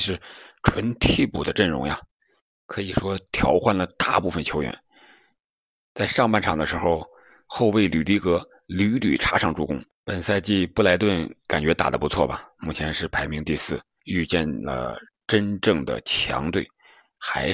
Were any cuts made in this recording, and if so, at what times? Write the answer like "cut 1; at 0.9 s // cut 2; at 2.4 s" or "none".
cut 1; at 10.0 s // cut 2; at 14.0 s